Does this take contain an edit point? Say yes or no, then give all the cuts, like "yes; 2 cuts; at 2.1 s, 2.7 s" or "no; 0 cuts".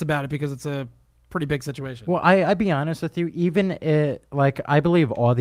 no; 0 cuts